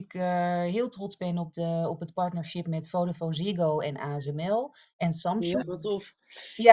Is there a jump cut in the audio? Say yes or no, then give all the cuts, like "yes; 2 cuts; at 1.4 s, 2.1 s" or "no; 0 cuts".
yes; 1 cut; at 5.6 s